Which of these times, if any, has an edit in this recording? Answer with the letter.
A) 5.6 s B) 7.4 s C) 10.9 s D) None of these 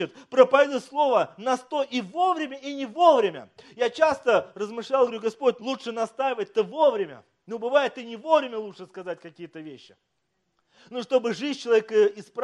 A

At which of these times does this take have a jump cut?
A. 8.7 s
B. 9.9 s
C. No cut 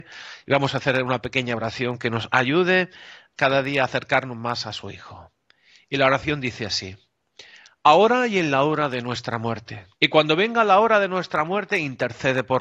B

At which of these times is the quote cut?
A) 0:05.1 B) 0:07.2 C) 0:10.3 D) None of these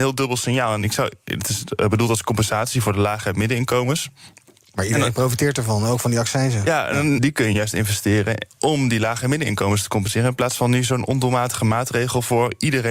B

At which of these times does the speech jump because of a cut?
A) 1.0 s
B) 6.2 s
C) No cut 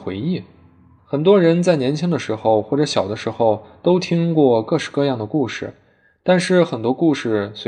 A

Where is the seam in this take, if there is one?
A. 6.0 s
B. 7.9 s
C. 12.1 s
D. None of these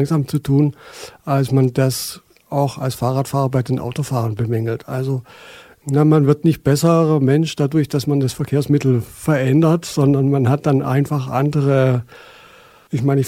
D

